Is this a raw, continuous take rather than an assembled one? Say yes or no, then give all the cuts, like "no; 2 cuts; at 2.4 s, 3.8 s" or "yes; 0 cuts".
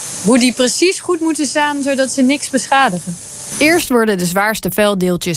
no; 1 cut; at 3.5 s